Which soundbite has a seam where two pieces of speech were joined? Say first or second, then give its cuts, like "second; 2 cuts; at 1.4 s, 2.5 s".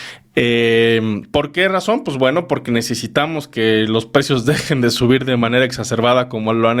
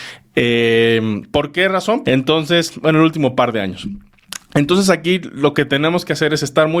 second; 1 cut; at 2.0 s